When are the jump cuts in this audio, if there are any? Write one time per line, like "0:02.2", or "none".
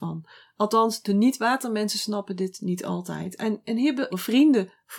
0:04.1